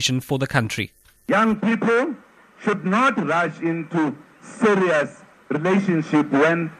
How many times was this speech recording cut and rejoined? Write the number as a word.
zero